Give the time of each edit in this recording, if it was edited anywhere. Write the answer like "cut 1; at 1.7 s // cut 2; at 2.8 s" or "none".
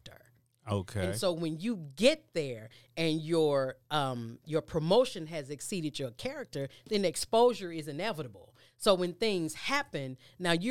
none